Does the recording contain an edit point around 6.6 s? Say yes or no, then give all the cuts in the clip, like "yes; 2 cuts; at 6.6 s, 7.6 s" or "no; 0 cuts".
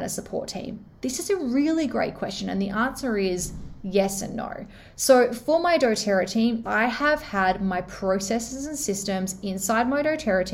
yes; 1 cut; at 6.6 s